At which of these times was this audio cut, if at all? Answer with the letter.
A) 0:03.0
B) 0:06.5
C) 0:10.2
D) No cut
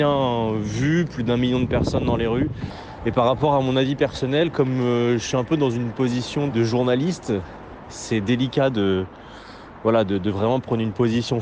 B